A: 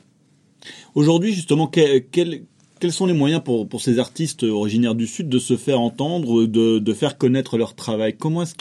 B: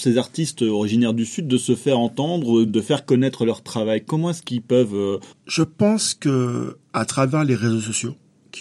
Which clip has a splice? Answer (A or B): B